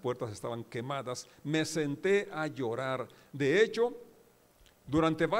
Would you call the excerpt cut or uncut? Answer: uncut